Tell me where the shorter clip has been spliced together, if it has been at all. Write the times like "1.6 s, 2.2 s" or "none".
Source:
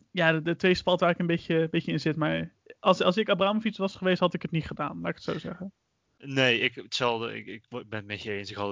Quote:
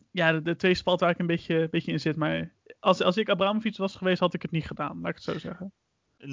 none